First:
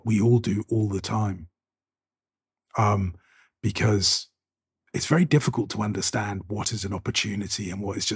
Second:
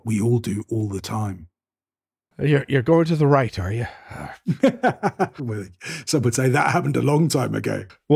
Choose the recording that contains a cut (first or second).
second